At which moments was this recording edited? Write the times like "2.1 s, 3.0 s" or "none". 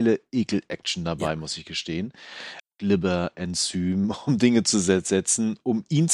2.6 s